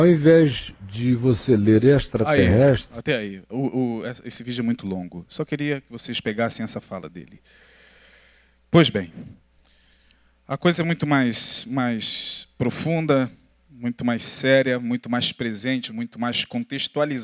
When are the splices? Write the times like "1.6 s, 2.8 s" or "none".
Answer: 15.9 s